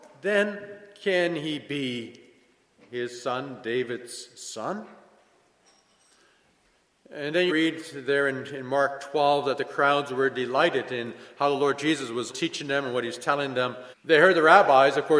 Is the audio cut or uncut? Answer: cut